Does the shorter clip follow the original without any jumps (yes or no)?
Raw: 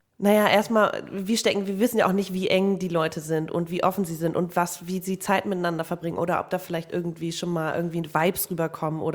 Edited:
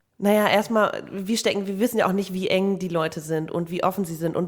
yes